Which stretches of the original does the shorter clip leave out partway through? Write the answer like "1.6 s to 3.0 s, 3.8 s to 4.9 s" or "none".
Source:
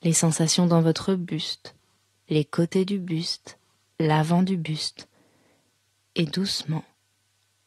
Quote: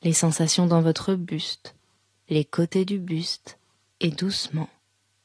3.9 s to 6.1 s

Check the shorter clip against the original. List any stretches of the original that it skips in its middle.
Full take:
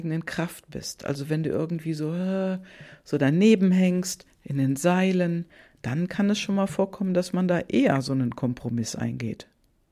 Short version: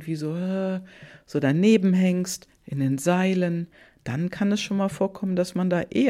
none

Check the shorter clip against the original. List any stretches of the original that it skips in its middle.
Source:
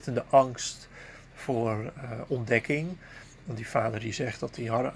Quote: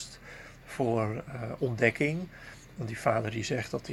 none

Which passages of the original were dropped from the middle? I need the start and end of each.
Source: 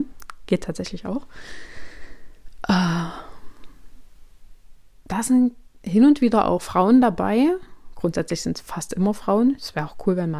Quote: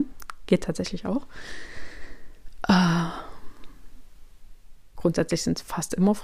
5.0 s to 7.9 s

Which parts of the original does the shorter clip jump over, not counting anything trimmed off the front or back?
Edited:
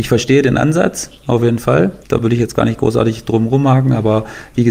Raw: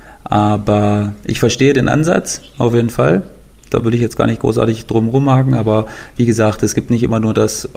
3.3 s to 3.6 s

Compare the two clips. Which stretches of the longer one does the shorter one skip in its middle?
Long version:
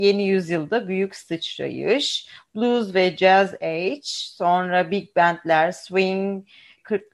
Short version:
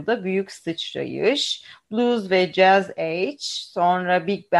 none

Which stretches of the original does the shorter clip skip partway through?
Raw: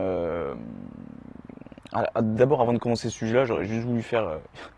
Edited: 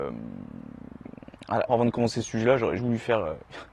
2.1 s to 2.6 s, 3.7 s to 3.8 s

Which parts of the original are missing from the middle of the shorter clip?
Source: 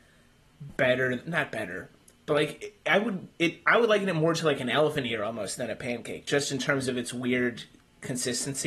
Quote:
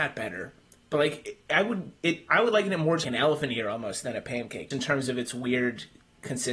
4.4 s to 4.6 s, 6.2 s to 6.5 s

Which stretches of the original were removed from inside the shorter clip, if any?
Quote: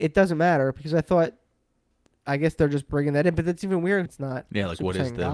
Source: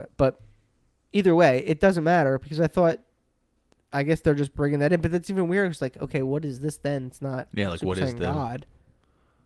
5.7 s to 7.1 s

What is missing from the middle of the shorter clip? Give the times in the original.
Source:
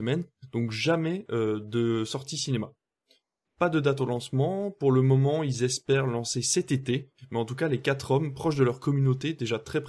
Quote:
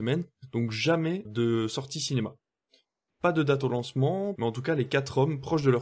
1.2 s to 1.6 s, 4.7 s to 7.3 s

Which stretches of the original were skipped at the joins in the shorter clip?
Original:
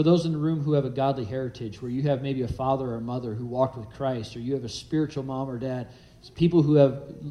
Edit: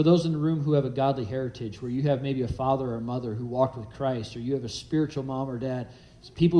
none

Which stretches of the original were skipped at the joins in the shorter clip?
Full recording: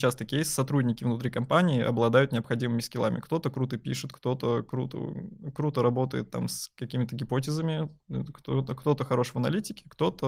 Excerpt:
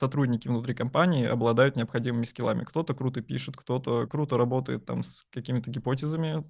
4.6 s to 5.5 s

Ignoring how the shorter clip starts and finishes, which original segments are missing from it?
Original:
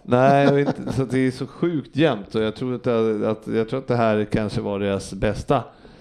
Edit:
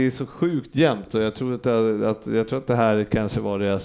none

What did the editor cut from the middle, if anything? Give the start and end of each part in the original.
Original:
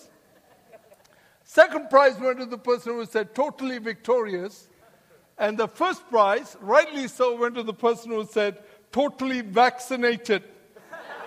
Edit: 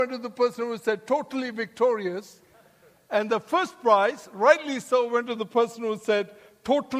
none

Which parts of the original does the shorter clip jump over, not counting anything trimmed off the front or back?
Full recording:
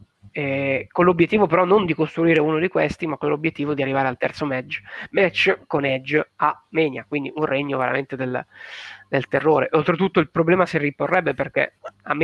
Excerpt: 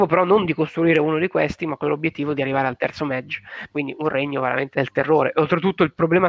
5.1 s to 7.1 s, 8.1 s to 9.1 s

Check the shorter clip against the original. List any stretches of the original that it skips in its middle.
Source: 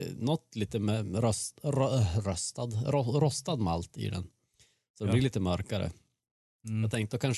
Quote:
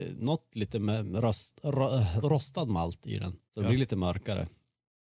2.2 s to 3.1 s, 4.4 s to 4.9 s

